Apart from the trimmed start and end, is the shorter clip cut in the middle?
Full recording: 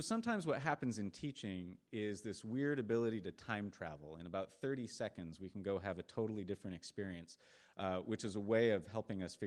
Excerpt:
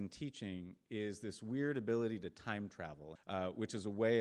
yes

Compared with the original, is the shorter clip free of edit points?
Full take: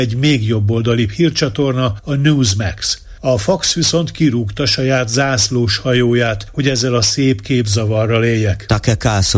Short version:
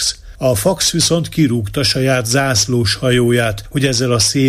yes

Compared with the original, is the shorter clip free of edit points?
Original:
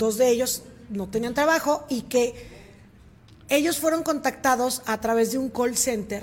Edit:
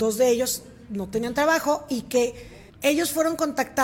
no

